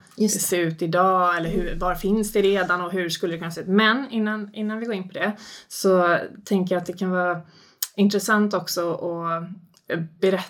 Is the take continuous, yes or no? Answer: yes